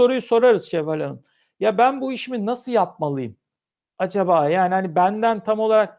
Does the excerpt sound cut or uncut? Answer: uncut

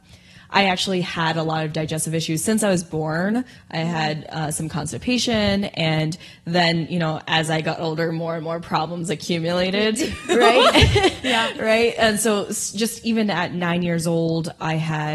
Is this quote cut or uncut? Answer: uncut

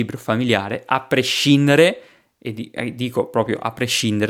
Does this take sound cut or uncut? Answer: uncut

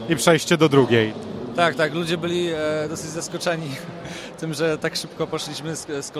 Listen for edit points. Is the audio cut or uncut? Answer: uncut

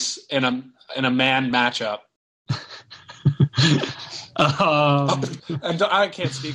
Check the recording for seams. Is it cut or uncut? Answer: cut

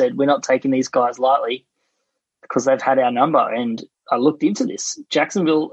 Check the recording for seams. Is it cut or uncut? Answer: uncut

